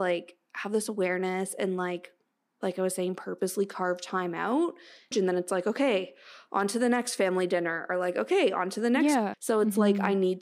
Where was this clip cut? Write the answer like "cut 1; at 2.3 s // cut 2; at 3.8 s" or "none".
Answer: cut 1; at 5.1 s // cut 2; at 9.3 s